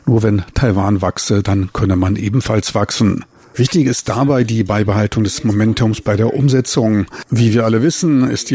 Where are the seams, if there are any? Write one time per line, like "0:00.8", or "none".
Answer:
0:03.5